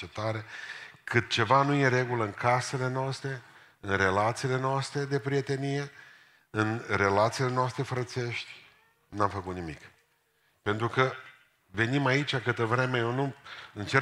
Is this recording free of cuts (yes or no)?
yes